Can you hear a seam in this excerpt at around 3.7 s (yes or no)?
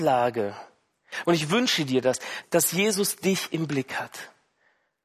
no